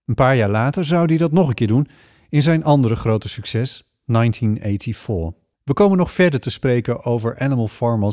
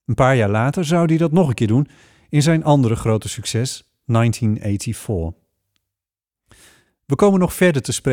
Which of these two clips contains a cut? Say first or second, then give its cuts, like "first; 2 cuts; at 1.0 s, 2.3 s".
first; 1 cut; at 5.5 s